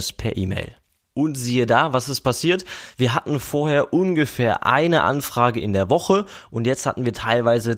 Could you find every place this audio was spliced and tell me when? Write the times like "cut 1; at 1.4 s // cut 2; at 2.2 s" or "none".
none